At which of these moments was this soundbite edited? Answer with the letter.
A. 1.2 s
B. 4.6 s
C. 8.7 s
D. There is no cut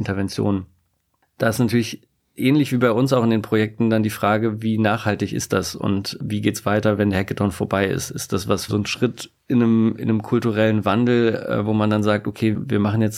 C